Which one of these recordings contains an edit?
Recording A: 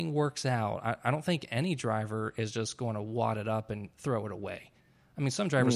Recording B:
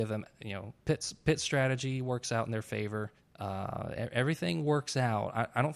B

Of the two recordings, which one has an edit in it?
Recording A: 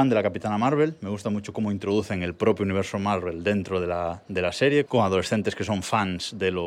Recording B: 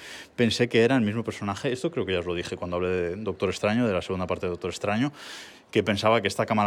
A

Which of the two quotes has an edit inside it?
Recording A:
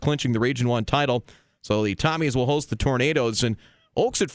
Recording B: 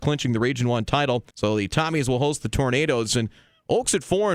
B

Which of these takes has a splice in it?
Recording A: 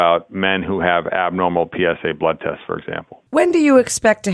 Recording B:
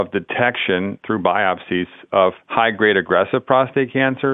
A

